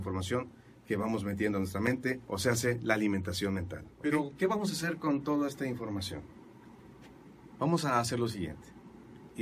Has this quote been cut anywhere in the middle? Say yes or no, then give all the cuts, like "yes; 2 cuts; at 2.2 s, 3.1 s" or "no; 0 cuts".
no; 0 cuts